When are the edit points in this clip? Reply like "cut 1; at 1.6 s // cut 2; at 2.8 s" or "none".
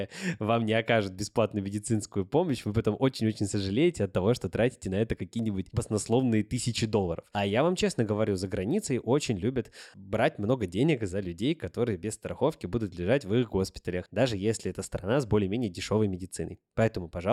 none